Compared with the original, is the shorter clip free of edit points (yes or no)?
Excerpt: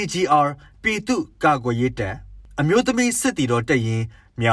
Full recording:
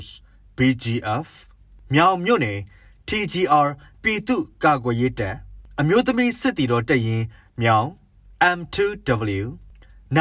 yes